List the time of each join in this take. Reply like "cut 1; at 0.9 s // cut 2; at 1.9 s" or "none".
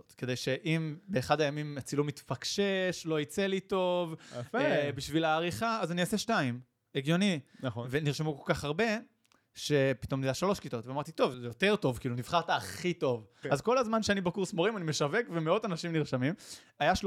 cut 1; at 11.3 s // cut 2; at 13.4 s

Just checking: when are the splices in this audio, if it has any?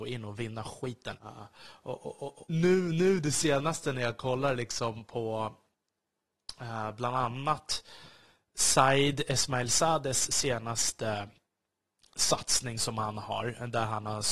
cut 1; at 1.2 s // cut 2; at 2.5 s

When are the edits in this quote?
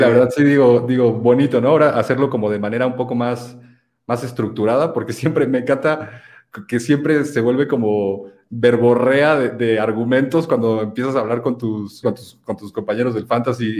cut 1; at 12.0 s

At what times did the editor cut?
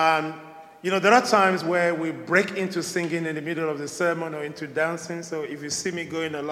none

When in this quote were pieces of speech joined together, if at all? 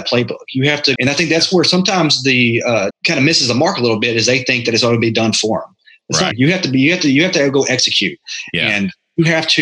cut 1; at 0.9 s // cut 2; at 2.9 s // cut 3; at 6.3 s

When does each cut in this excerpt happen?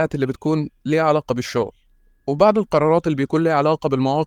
none

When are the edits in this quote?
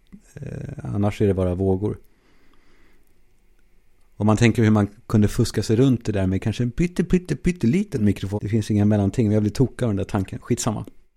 cut 1; at 8.4 s

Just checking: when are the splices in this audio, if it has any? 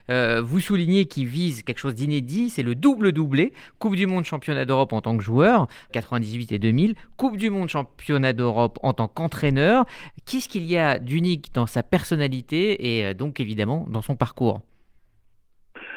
cut 1; at 5.9 s

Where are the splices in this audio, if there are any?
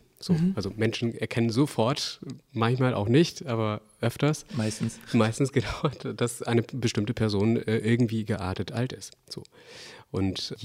none

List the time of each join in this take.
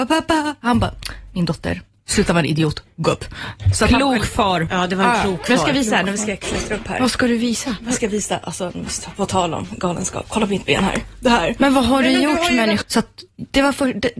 cut 1; at 12.8 s

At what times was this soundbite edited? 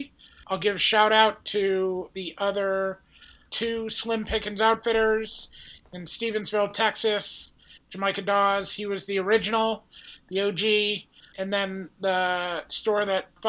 none

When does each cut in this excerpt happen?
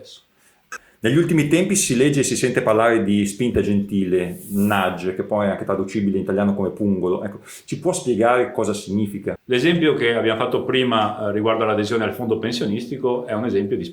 cut 1; at 9.3 s

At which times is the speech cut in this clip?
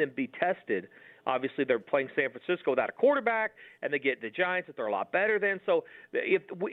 none

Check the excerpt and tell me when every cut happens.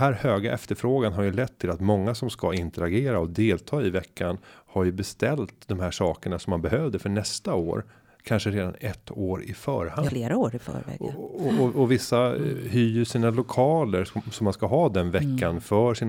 cut 1; at 10.1 s // cut 2; at 14.1 s

